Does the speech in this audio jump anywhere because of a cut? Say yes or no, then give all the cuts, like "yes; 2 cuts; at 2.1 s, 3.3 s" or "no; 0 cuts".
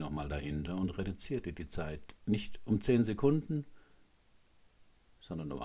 no; 0 cuts